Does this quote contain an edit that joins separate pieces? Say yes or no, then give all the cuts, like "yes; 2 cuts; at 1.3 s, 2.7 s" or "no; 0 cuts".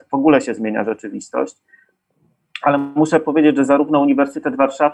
no; 0 cuts